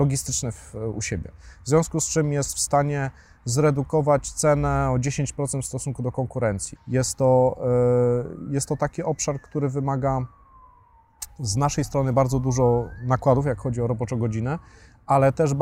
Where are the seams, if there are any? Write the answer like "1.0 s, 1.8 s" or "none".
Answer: 6.8 s

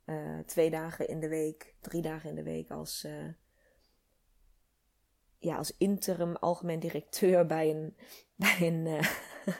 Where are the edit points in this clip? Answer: none

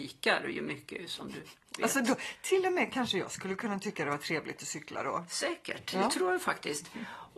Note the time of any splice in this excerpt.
none

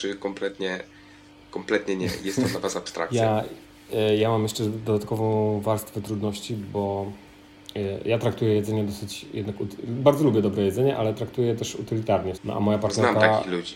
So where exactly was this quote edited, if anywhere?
12.4 s

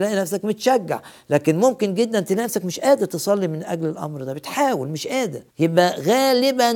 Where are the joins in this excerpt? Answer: 5.5 s

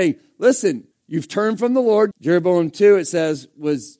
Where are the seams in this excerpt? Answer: 0.9 s, 2.1 s

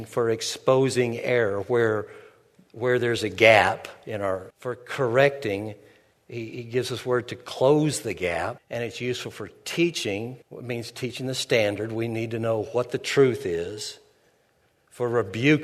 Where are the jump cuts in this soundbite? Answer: 4.5 s, 8.6 s, 10.4 s

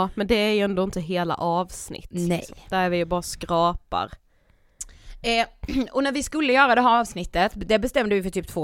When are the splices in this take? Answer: none

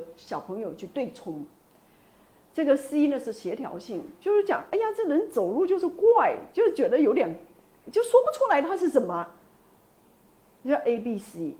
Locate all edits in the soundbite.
none

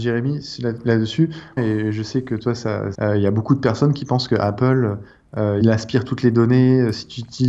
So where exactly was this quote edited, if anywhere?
1.6 s, 2.9 s, 5.6 s

